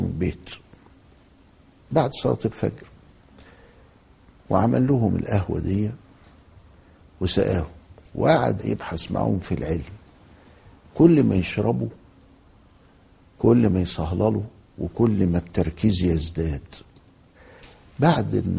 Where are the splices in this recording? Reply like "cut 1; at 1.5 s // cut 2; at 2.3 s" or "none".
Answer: cut 1; at 8.6 s

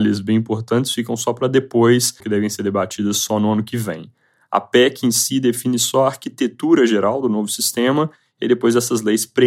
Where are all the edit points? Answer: cut 1; at 2.2 s

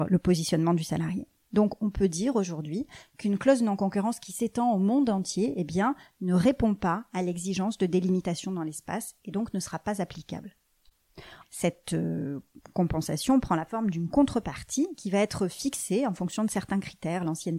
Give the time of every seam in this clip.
cut 1; at 11.4 s

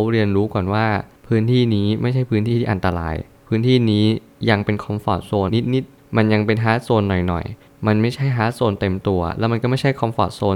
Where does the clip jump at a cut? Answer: cut 1; at 5.5 s

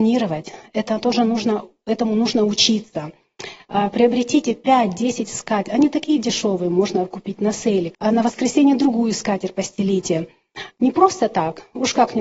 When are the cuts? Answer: cut 1; at 7.9 s // cut 2; at 10.7 s

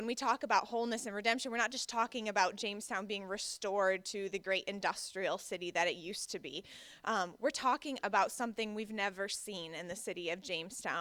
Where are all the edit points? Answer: none

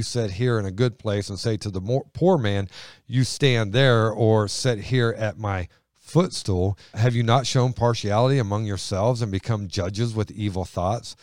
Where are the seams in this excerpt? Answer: none

